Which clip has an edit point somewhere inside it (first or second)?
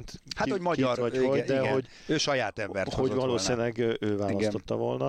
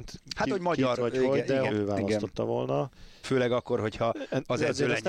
second